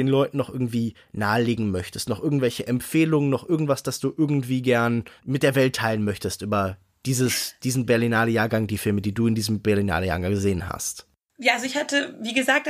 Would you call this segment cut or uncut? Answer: cut